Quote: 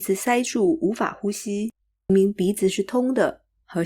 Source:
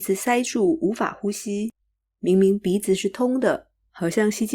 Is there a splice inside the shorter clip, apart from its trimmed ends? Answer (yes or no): yes